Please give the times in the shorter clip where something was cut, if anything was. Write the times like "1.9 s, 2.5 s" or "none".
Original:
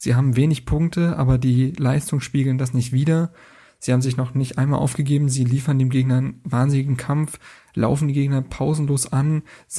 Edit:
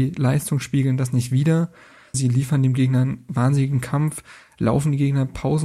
2.1 s